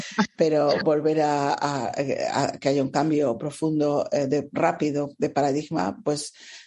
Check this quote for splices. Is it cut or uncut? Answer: uncut